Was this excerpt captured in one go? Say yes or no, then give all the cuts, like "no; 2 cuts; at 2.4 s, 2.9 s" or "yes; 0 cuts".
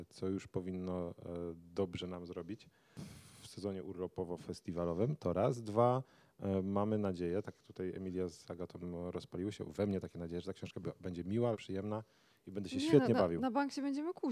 no; 1 cut; at 11.5 s